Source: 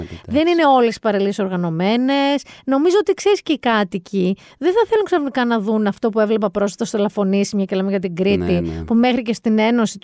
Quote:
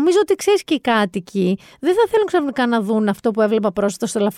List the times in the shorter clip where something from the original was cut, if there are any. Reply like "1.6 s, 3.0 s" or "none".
none